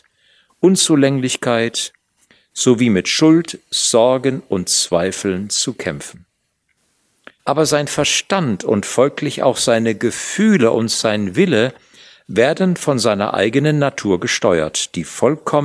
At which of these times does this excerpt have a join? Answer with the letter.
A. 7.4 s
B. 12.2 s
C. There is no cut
A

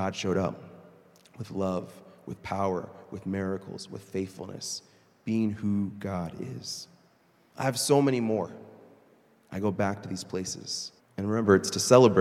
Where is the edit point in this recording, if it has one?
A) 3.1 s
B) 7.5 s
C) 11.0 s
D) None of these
C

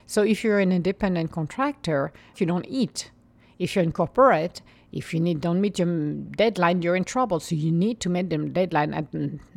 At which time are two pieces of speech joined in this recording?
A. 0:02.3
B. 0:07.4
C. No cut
A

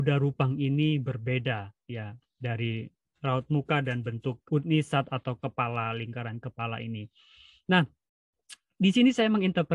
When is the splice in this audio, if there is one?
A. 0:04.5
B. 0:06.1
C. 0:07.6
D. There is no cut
A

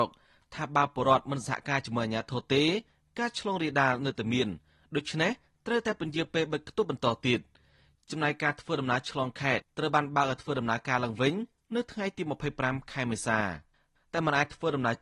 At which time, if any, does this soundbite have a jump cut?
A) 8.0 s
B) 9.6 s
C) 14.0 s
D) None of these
B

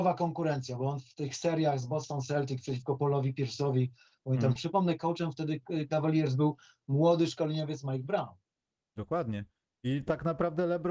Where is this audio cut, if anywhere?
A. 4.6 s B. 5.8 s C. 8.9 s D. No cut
A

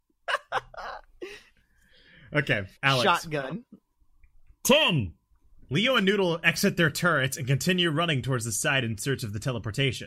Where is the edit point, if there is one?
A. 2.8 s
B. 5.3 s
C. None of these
A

